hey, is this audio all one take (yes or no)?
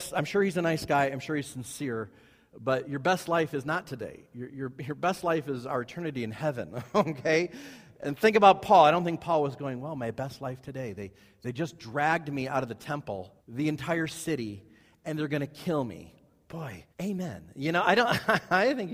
no